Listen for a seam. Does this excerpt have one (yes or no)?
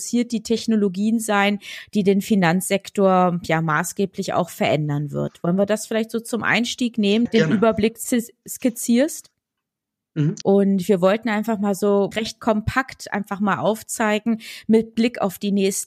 yes